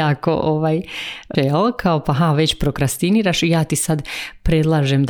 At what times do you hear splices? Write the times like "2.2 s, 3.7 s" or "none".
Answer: 1.3 s